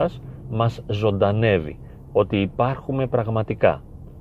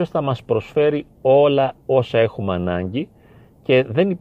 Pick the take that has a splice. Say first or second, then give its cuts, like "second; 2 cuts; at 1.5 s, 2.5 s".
first; 1 cut; at 2.0 s